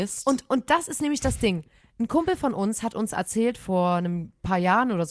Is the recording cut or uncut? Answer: uncut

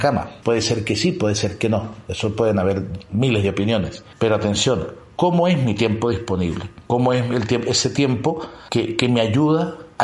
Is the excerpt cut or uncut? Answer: uncut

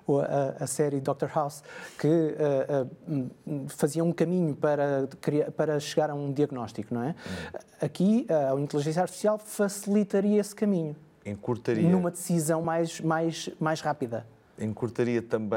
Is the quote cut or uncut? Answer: uncut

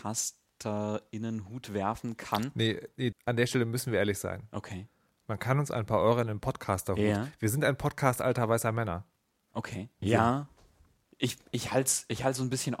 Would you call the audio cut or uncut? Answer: cut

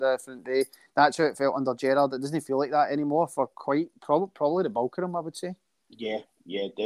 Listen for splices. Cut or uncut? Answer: uncut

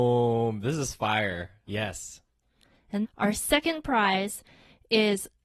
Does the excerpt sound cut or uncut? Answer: cut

